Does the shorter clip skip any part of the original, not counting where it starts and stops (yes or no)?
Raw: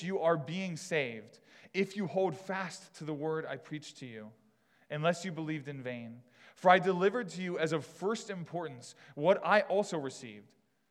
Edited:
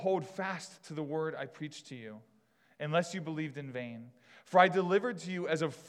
no